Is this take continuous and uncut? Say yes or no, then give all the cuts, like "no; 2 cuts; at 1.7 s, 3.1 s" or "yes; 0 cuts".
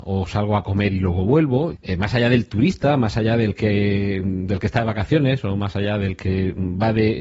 no; 1 cut; at 1.7 s